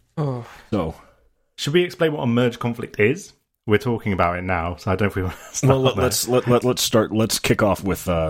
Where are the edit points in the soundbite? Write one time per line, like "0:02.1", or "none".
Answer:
0:06.6